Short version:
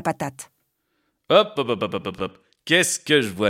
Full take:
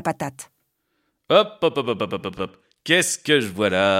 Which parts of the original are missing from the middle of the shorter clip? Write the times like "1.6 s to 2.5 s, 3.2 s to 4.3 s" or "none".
1.6 s to 1.7 s